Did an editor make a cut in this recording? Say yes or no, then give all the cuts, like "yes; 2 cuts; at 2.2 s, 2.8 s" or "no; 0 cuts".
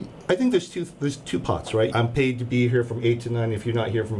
yes; 1 cut; at 1.9 s